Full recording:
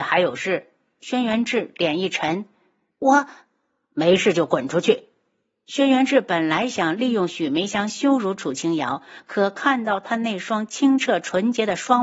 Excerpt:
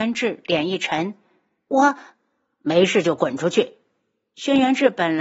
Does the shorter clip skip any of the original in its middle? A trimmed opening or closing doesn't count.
no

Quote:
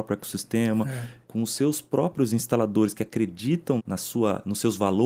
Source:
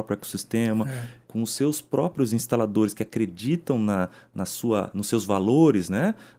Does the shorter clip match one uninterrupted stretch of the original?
no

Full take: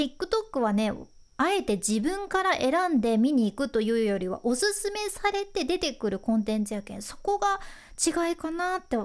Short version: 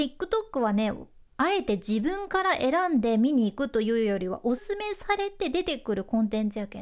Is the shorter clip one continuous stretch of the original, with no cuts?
no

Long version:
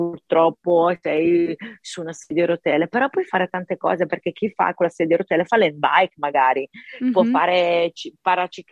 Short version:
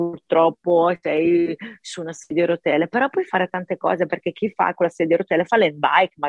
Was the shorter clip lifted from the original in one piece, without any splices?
yes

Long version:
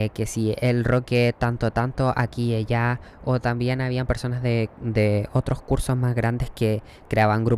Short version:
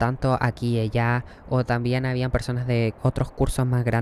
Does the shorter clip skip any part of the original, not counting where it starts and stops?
yes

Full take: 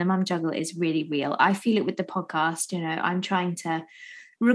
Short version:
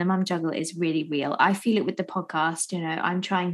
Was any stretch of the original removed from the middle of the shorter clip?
no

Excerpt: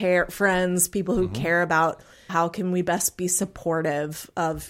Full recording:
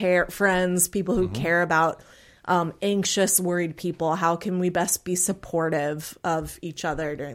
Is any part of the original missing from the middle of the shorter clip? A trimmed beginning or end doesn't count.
yes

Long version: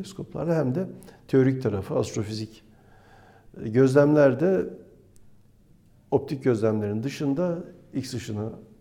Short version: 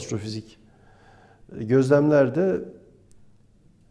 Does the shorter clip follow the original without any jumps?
yes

